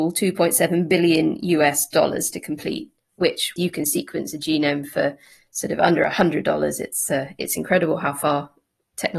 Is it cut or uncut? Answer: cut